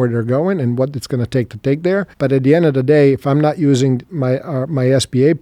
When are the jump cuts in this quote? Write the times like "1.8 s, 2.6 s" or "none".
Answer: 2.1 s